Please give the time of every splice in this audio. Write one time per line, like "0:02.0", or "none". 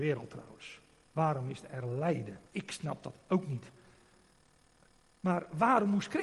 0:02.5